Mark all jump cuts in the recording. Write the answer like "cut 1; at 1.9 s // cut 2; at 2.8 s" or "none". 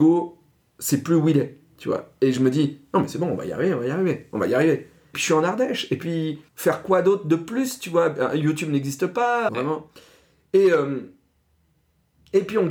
cut 1; at 5.1 s // cut 2; at 6.5 s // cut 3; at 9.5 s